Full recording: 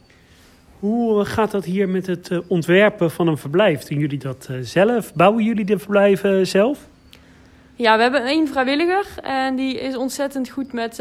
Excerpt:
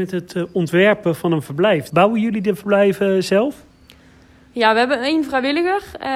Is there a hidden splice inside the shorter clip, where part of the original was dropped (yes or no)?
yes